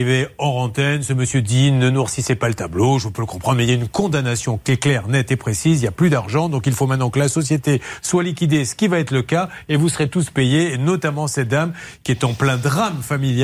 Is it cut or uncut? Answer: uncut